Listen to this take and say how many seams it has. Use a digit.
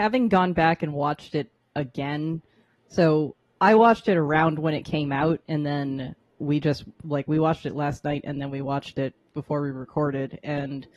1